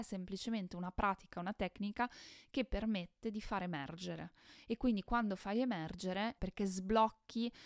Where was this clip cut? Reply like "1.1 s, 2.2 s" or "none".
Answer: 6.4 s